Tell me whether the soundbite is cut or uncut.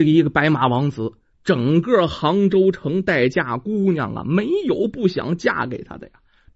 uncut